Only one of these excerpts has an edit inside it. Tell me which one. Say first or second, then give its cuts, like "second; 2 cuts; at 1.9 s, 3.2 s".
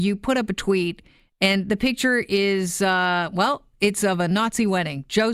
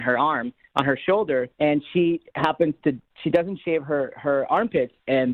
second; 1 cut; at 1.5 s